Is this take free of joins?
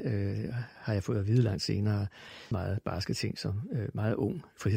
no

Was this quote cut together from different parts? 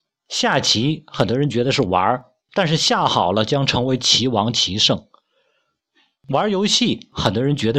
no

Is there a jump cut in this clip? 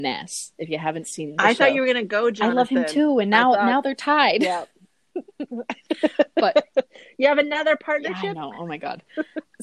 no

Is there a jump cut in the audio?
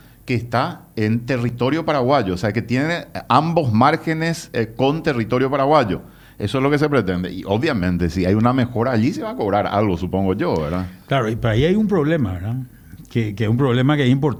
no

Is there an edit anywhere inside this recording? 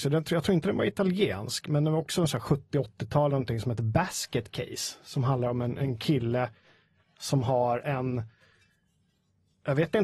no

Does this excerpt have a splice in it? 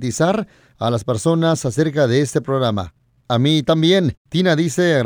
yes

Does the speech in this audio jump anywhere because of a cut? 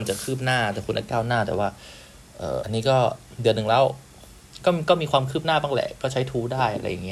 yes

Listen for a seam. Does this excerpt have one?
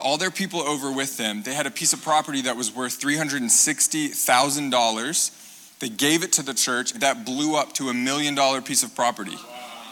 yes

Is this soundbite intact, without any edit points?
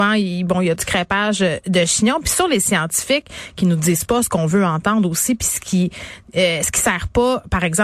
yes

